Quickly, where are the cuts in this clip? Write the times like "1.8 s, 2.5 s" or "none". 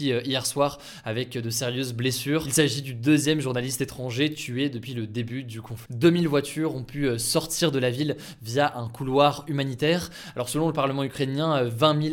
5.9 s